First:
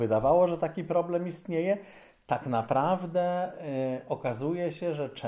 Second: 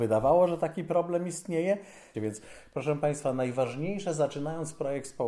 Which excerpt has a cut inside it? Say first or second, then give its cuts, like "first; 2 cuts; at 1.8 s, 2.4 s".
second; 1 cut; at 2.1 s